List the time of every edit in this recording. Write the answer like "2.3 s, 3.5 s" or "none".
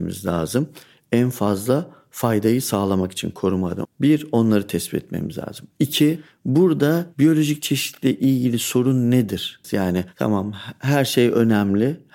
3.8 s, 9.6 s